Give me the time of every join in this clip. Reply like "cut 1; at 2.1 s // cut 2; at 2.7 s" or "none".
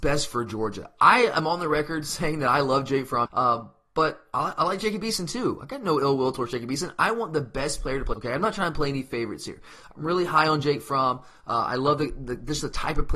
cut 1; at 3.3 s // cut 2; at 8.1 s